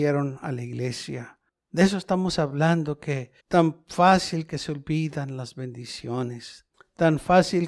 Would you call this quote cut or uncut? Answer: cut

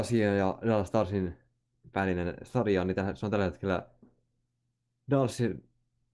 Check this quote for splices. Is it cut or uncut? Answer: uncut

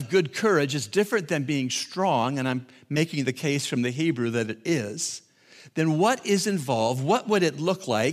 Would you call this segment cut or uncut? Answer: uncut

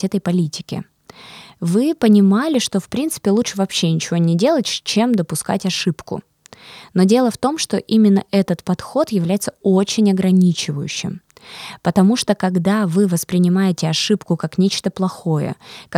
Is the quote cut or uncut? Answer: uncut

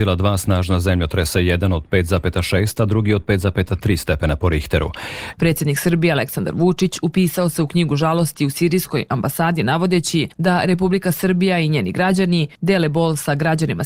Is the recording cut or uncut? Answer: cut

